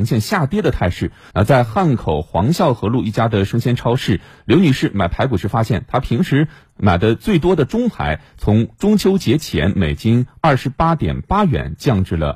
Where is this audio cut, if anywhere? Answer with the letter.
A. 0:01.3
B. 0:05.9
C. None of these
A